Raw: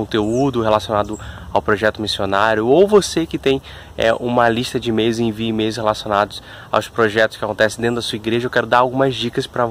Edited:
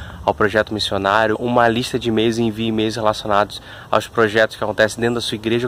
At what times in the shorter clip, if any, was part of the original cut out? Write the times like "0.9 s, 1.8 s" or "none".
1.3 s